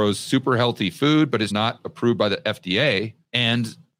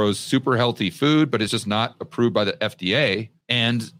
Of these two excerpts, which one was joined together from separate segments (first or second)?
first